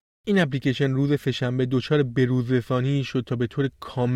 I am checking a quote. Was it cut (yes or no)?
no